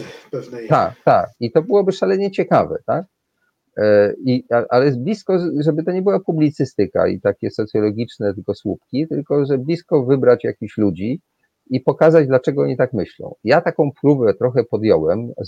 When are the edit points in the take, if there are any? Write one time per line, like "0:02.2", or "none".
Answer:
none